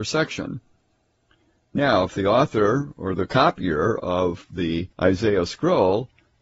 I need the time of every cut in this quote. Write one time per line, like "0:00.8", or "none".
0:04.9

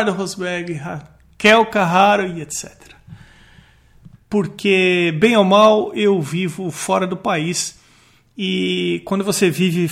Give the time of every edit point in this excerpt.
0:04.1

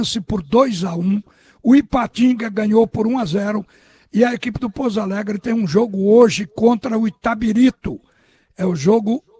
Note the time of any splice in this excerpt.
none

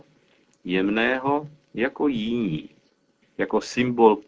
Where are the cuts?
0:03.2

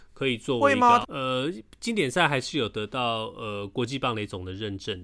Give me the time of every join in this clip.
0:01.0

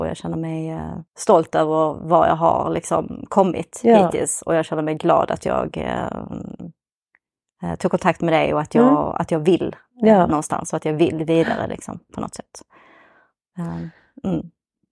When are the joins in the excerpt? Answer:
0:01.1

